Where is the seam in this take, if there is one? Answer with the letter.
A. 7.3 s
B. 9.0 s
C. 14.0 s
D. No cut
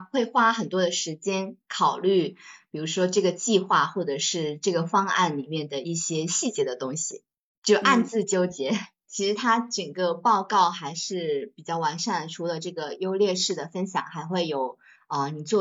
B